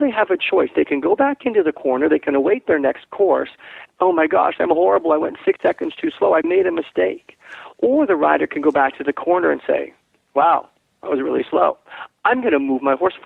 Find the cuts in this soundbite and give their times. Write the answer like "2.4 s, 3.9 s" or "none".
3.9 s